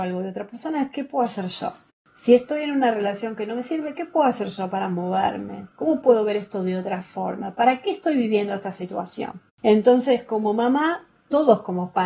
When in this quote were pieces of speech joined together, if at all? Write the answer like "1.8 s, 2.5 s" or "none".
none